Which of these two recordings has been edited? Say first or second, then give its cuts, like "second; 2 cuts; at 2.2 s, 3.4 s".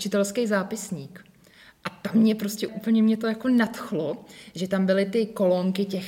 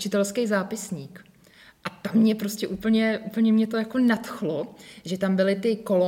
first; 1 cut; at 2.7 s